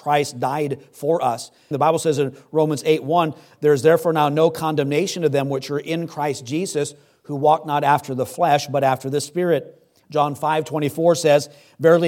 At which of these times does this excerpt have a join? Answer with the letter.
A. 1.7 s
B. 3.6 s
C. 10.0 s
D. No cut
A